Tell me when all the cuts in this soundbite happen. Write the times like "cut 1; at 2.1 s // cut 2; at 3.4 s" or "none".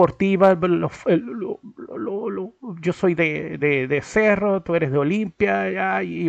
cut 1; at 3.6 s